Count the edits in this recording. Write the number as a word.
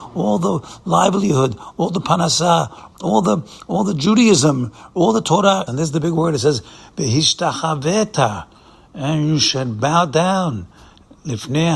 two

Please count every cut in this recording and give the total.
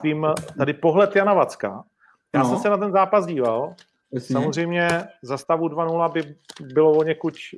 zero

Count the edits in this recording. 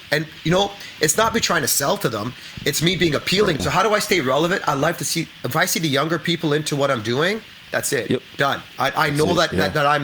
one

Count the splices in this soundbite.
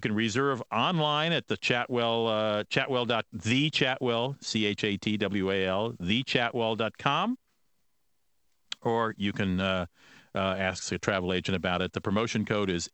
zero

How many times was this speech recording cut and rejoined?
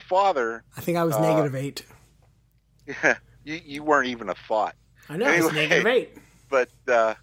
zero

